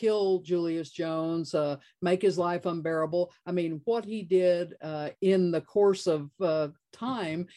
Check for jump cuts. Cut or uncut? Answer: uncut